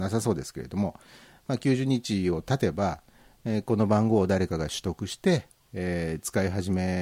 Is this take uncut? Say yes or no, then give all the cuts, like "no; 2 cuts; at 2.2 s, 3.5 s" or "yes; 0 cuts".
yes; 0 cuts